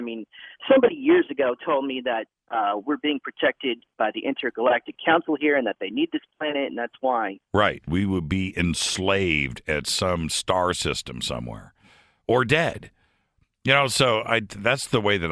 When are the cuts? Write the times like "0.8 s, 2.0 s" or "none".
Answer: 7.9 s